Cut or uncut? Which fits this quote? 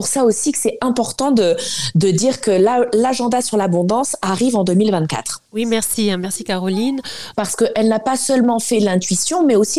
cut